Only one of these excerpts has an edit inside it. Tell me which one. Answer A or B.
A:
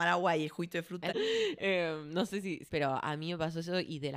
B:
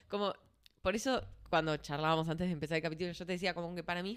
A